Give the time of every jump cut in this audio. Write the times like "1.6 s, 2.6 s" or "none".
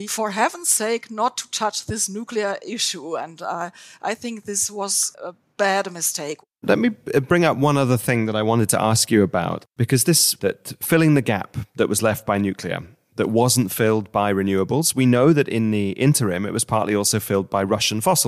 10.4 s